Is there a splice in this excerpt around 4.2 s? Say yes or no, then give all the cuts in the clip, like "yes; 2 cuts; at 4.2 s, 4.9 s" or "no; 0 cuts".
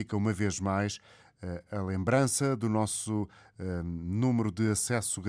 no; 0 cuts